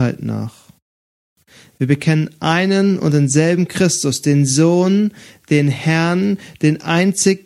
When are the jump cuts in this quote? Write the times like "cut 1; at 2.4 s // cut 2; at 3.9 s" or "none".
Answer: none